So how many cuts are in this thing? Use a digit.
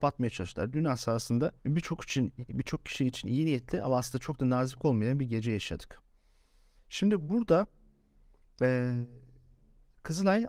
2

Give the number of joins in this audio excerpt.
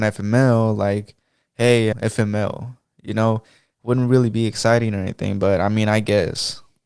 1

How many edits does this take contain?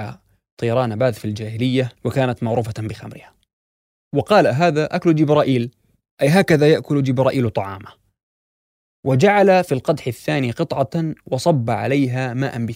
1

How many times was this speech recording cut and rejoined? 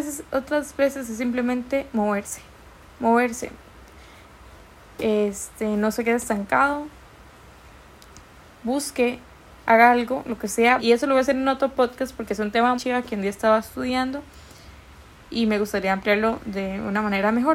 3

